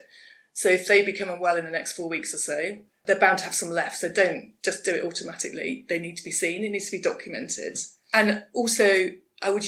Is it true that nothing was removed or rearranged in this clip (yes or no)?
yes